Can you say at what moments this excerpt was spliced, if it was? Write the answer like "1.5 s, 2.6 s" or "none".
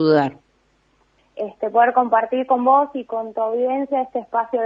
1.2 s